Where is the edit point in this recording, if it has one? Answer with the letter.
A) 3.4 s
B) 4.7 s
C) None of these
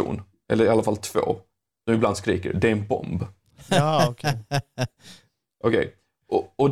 C